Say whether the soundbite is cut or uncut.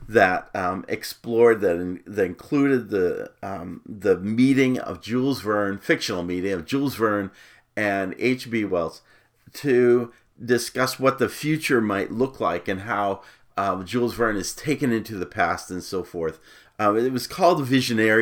cut